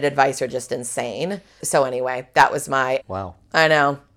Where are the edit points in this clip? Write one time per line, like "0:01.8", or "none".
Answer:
0:01.6
0:03.0